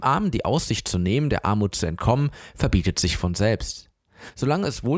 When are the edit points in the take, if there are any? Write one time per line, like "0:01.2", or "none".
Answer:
none